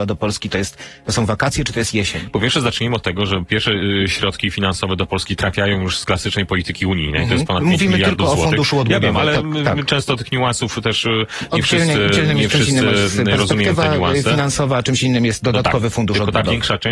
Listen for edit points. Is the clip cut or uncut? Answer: uncut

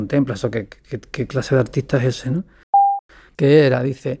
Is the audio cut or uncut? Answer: cut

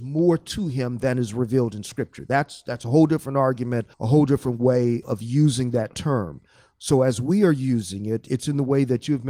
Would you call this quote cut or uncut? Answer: cut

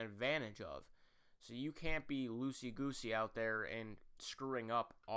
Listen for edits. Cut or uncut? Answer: uncut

